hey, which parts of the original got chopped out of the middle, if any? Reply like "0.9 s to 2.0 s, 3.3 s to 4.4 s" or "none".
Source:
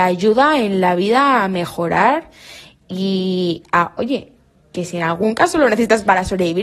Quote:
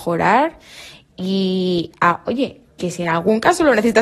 4.4 s to 4.6 s